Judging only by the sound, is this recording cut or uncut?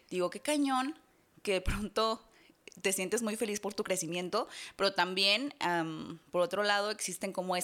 uncut